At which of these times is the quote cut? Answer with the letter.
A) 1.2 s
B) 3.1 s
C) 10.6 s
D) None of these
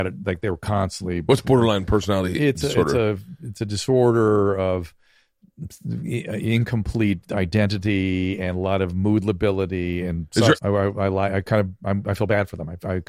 C